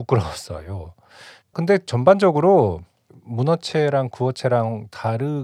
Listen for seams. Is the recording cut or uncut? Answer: cut